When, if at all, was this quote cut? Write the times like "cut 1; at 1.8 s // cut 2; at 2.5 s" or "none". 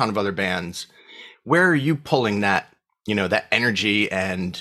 cut 1; at 1.3 s